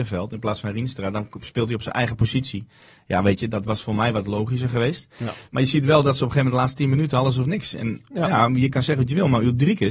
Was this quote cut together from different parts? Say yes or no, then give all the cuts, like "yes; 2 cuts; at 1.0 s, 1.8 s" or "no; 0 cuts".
no; 0 cuts